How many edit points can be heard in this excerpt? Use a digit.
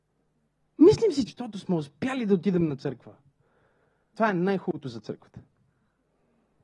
2